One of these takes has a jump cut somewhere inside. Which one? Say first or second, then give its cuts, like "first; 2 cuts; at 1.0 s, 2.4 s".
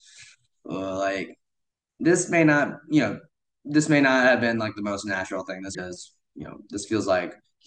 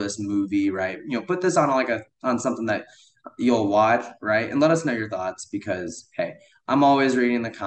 first; 1 cut; at 5.7 s